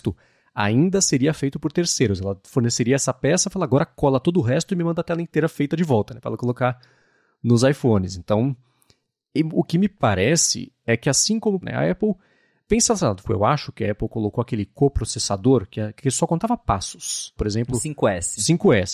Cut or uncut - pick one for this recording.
cut